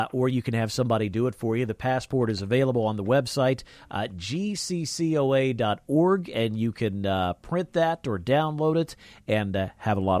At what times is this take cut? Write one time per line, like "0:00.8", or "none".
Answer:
none